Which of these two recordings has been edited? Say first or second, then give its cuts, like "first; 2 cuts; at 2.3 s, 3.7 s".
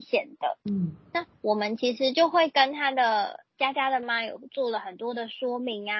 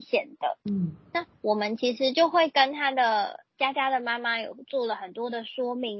first; 1 cut; at 4.0 s